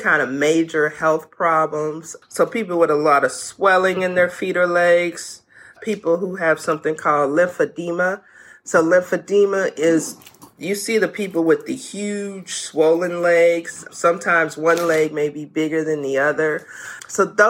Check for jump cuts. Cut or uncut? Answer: uncut